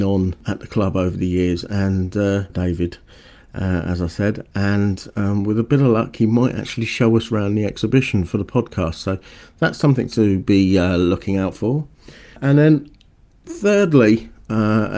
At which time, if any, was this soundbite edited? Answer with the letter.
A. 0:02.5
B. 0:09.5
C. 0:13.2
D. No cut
A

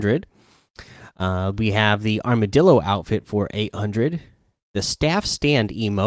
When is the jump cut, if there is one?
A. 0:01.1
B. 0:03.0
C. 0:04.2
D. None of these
D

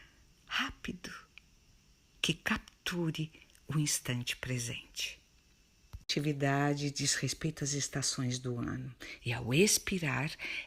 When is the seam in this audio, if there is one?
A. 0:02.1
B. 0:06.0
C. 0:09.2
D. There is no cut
C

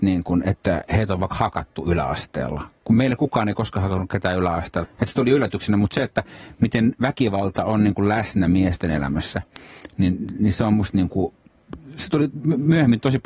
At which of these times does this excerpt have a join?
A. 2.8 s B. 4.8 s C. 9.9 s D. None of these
B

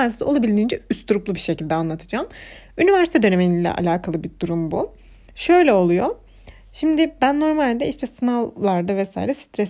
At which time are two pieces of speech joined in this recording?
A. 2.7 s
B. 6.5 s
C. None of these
C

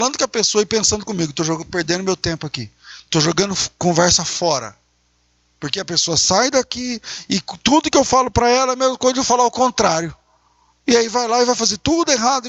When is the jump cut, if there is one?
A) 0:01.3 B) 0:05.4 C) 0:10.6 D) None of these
D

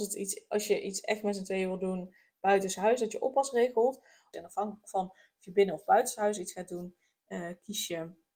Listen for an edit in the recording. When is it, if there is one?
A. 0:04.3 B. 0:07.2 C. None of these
A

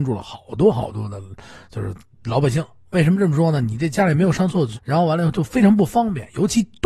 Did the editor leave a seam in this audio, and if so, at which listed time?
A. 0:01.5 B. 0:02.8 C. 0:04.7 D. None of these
C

